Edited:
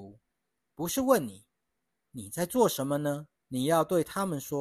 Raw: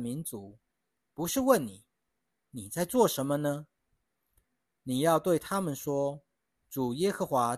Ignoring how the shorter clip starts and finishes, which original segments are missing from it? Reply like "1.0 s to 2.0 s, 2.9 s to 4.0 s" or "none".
3.7 s to 4.7 s